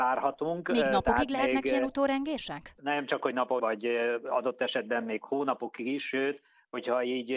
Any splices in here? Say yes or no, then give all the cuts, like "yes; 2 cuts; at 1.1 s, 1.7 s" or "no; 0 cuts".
yes; 1 cut; at 3.6 s